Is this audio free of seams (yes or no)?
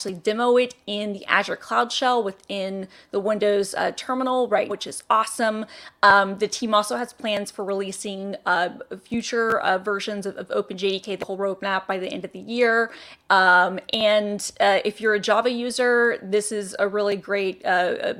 no